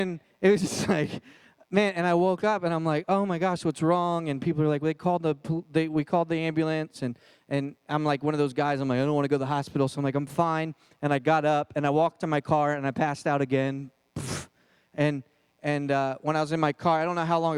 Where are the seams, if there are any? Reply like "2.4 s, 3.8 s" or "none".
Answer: none

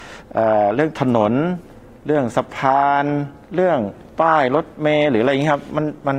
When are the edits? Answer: 3.4 s

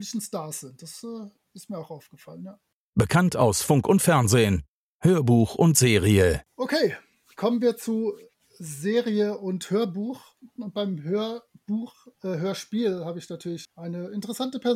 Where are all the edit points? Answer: 10.6 s, 12.1 s, 13.6 s

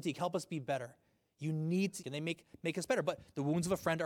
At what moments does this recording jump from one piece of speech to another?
2.0 s

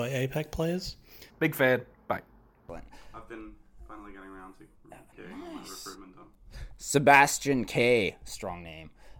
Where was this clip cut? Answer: 1.3 s

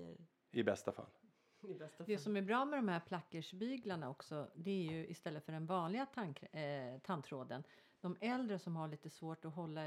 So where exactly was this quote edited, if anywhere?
none

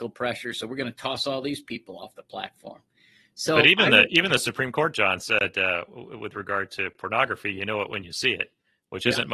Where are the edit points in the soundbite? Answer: none

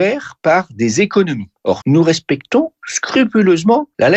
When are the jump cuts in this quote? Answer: 1.8 s

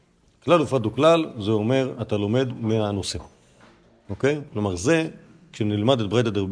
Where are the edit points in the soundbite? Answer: none

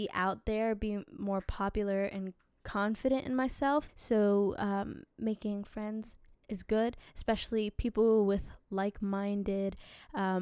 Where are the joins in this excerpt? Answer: 3.9 s

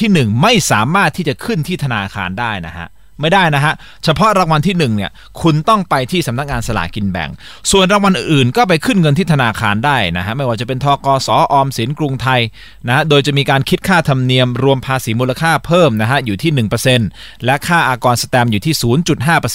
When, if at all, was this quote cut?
none

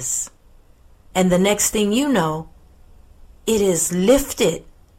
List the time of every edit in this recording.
1.1 s

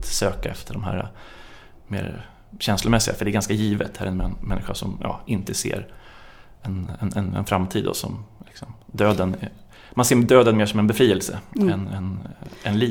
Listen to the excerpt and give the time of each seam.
none

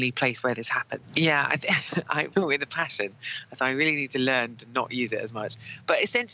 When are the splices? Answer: 1.0 s, 2.3 s

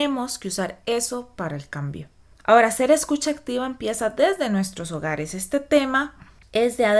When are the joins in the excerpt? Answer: none

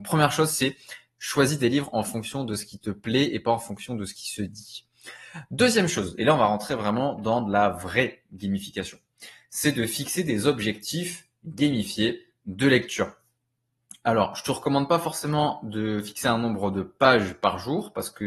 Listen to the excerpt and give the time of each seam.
none

